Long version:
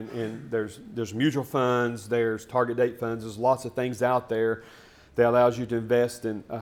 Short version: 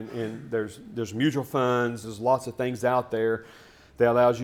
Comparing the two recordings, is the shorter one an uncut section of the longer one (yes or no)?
no